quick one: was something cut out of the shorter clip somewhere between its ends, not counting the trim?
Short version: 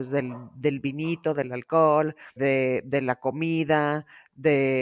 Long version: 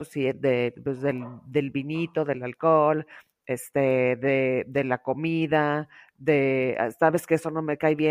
yes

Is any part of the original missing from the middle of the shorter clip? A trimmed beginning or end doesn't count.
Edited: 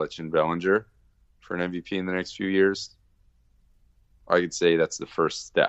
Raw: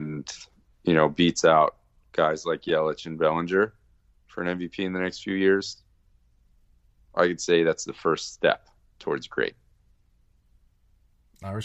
no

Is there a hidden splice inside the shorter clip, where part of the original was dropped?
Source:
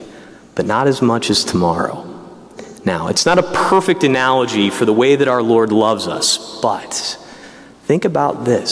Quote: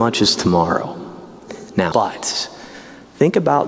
yes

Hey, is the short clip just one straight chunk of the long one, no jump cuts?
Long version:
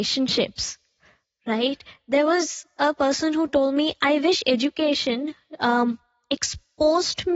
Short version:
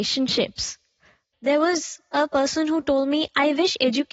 no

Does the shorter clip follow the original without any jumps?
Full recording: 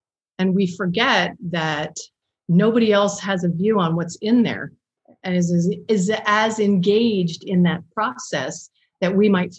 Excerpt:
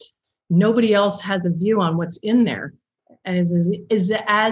yes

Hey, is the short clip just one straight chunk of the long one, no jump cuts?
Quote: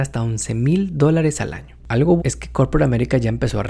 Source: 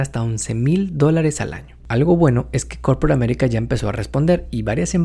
no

